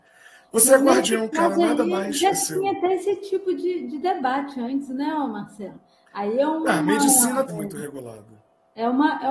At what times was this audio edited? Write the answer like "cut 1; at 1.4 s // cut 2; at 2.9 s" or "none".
cut 1; at 7.5 s